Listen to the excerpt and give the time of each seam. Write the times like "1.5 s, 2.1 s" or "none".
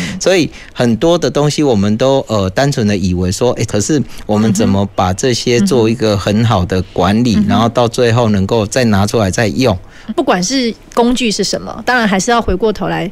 3.7 s, 10.1 s

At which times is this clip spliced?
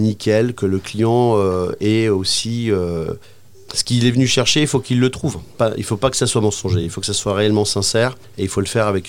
none

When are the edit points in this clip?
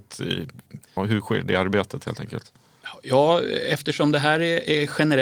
1.0 s

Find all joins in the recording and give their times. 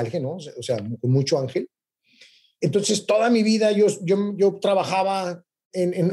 none

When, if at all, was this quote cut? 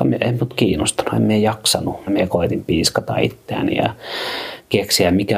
2.1 s

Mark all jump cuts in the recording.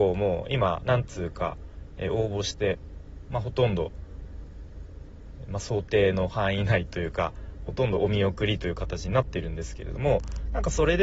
none

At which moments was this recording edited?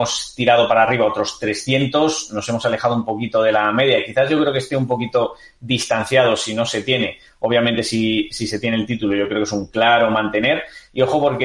none

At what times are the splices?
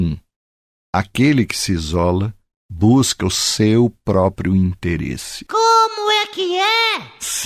none

